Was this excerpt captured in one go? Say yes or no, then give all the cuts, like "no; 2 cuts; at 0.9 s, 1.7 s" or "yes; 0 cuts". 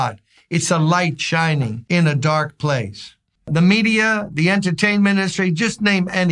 no; 1 cut; at 3.4 s